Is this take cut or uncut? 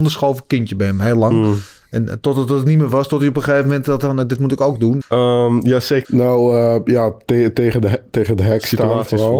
cut